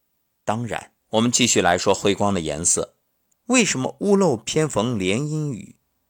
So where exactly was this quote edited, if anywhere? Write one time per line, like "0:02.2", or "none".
0:01.0
0:03.3